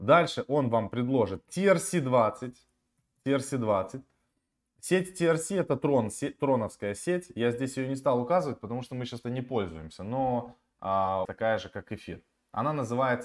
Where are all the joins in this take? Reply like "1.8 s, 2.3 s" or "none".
9.2 s, 11.3 s